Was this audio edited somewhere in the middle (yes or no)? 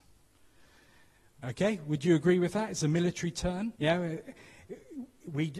yes